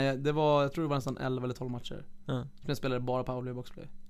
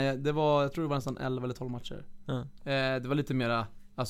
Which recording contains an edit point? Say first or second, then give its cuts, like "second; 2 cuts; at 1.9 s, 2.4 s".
second; 1 cut; at 2.6 s